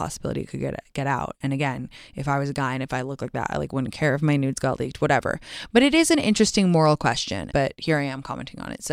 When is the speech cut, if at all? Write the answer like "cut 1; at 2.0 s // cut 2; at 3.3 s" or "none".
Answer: cut 1; at 7.5 s

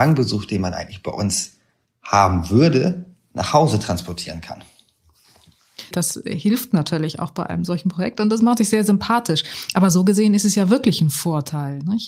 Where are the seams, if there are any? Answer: cut 1; at 5.9 s

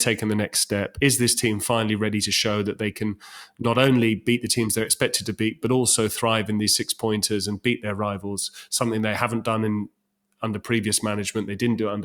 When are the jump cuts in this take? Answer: none

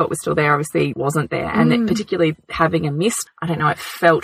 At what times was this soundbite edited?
cut 1; at 0.9 s // cut 2; at 3.3 s

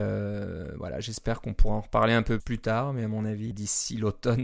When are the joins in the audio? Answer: cut 1; at 2.4 s // cut 2; at 3.5 s

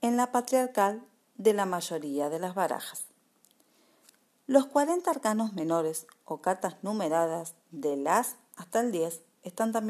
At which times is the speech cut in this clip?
none

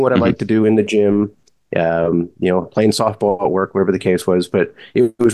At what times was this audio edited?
none

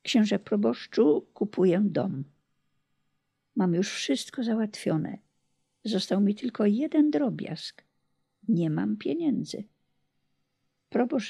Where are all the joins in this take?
none

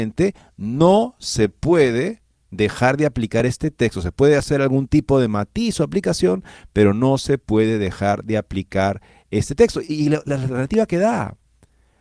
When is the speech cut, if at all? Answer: none

